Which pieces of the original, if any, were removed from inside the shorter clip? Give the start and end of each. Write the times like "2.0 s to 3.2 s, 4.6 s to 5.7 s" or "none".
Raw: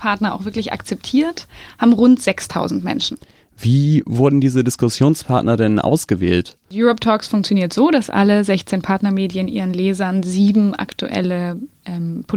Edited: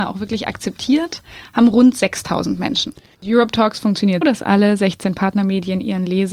3.4 s to 6.6 s, 7.7 s to 7.9 s